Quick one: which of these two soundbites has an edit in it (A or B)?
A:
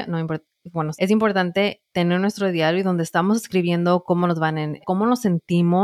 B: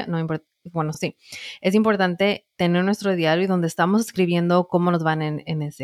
A